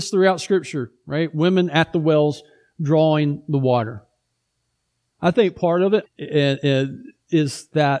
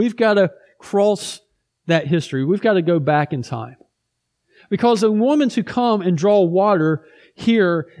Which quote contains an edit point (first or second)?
first